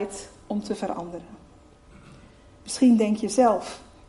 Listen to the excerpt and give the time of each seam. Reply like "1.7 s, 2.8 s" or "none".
none

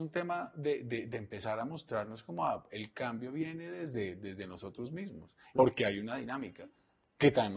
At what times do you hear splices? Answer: 5.6 s

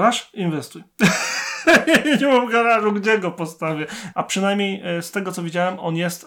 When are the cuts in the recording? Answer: 4.1 s

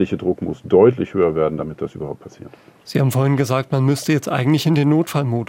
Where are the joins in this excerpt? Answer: none

